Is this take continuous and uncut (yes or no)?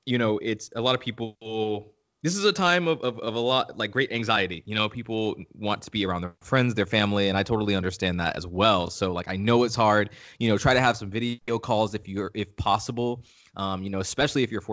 yes